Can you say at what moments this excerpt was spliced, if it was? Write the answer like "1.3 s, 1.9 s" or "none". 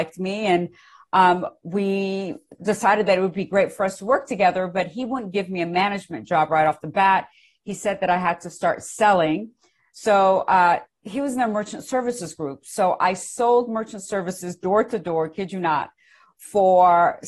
none